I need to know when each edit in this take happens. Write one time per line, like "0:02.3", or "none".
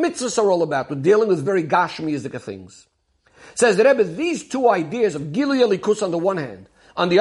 0:01.4